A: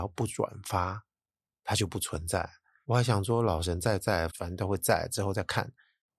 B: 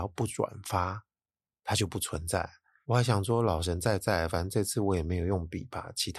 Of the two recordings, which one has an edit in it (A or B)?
A